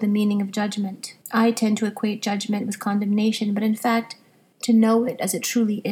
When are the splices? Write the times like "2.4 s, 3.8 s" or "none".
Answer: 1.2 s, 4.5 s